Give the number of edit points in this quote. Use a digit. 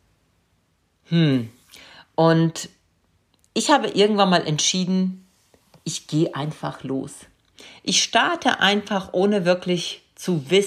0